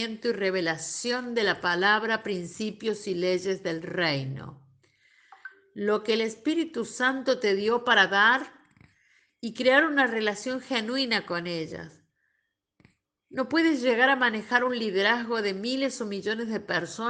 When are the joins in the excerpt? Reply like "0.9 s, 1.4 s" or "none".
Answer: none